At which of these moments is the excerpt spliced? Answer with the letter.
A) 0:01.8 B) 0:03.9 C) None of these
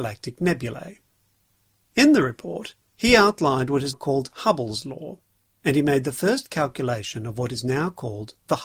B